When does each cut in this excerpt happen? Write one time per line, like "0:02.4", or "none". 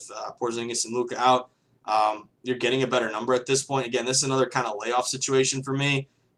none